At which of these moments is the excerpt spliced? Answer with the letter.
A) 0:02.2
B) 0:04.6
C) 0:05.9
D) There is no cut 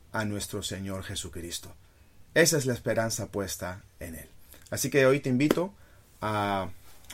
D